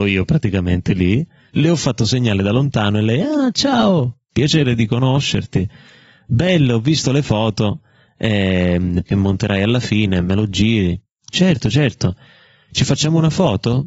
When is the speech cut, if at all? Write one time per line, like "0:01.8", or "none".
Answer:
0:09.1